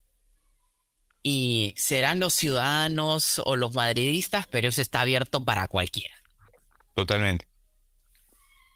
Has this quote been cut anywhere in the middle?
no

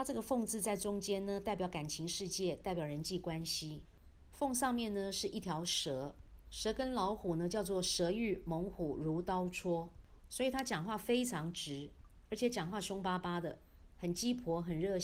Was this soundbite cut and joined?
no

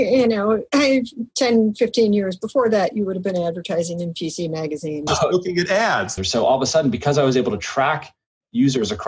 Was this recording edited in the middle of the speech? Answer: yes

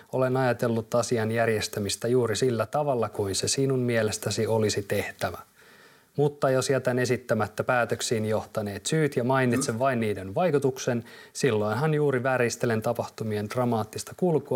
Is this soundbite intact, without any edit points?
yes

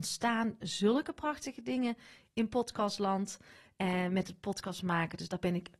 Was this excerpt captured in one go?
yes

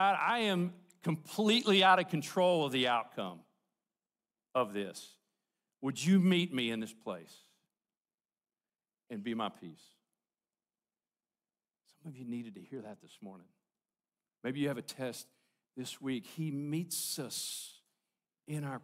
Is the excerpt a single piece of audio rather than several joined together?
yes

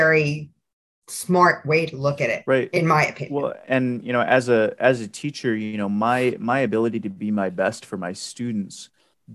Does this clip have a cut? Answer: yes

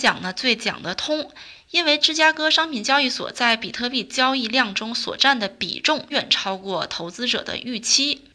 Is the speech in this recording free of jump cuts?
no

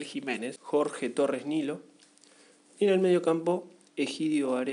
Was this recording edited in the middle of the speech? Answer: no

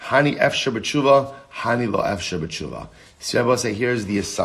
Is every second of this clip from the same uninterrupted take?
yes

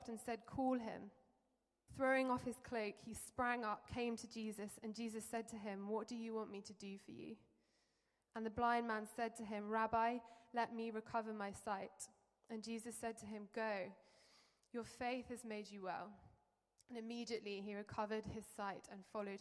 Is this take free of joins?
no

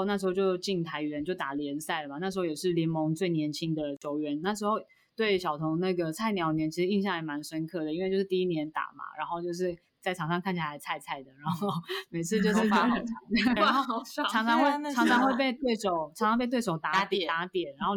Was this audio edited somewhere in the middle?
yes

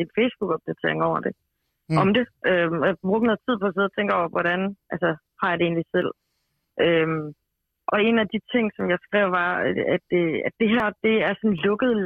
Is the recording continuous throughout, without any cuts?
yes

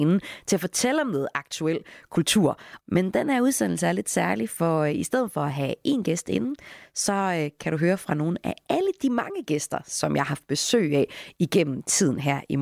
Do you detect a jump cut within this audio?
yes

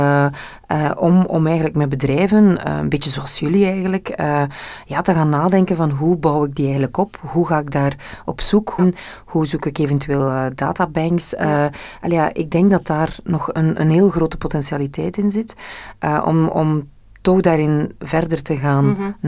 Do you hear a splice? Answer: yes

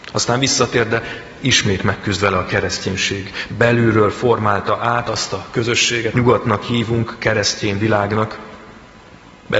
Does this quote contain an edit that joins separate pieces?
yes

